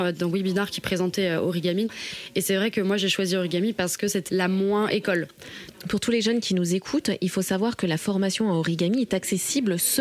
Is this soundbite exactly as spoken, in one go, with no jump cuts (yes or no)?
yes